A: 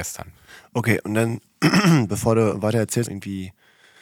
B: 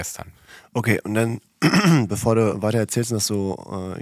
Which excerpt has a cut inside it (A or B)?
A